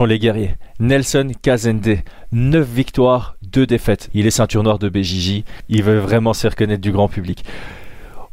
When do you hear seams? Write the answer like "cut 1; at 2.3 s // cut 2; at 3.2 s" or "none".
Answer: cut 1; at 4.1 s

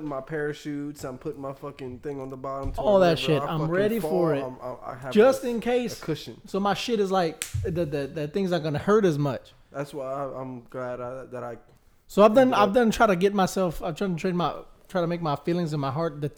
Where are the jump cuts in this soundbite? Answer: none

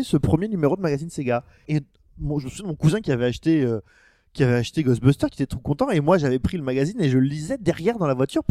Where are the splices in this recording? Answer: cut 1; at 1.6 s

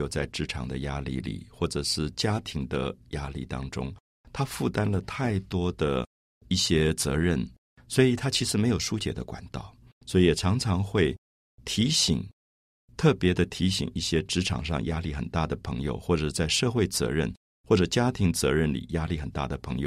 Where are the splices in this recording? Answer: cut 1; at 10.0 s

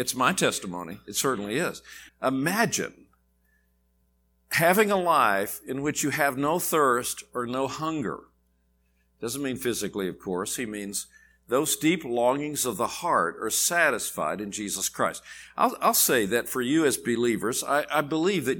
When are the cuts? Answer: cut 1; at 2.1 s

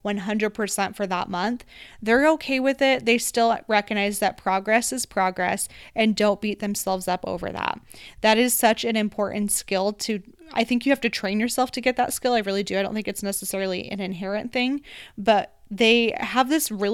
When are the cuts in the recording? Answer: none

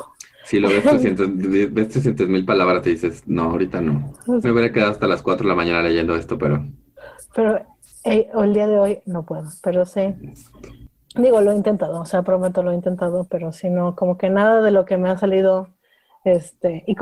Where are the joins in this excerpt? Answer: cut 1; at 4.4 s

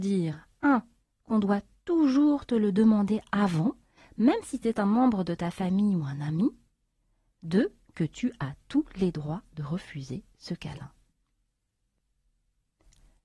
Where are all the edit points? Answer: none

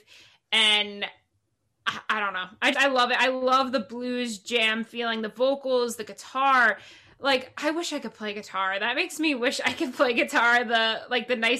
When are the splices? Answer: cut 1; at 2.7 s

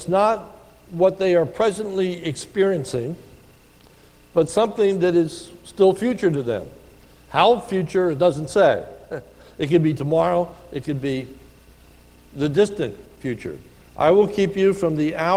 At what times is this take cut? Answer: cut 1; at 13.9 s

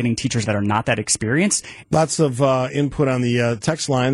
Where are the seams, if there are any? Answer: cut 1; at 1.8 s

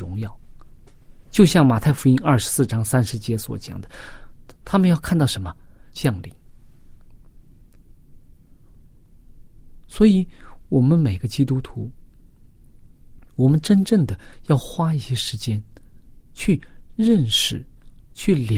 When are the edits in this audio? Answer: cut 1; at 5.9 s

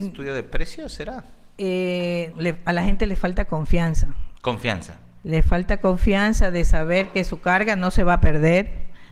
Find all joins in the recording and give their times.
cut 1; at 2.3 s

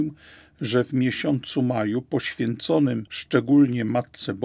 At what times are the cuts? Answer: none

